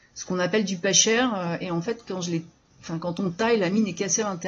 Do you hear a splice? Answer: no; 0 cuts

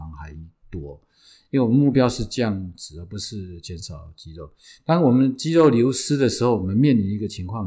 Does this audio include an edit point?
no; 0 cuts

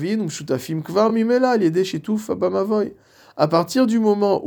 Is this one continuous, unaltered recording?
yes; 0 cuts

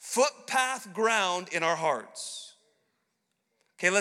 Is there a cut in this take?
no; 0 cuts

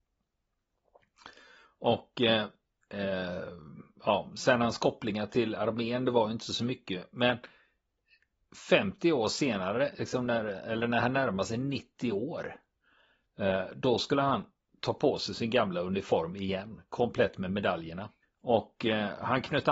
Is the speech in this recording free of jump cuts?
no; 1 cut; at 18.2 s

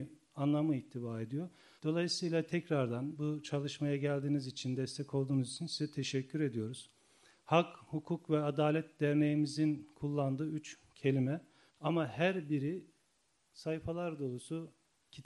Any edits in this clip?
yes; 1 cut; at 1.8 s

